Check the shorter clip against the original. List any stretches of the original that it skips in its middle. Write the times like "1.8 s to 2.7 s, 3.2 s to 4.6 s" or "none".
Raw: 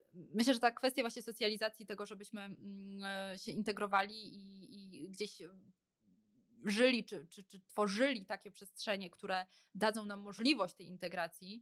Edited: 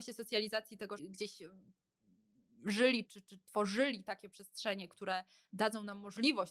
2.1 s to 5.0 s, 7.0 s to 7.3 s